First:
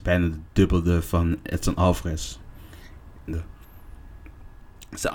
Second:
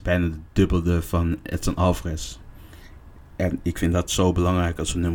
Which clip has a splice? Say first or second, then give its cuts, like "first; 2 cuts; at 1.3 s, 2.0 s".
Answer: first; 1 cut; at 3.3 s